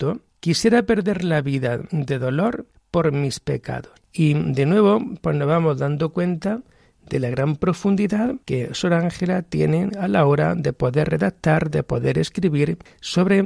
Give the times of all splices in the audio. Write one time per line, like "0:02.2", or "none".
0:04.0
0:08.4